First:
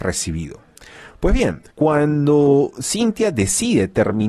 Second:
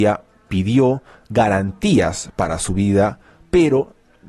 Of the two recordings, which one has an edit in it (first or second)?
first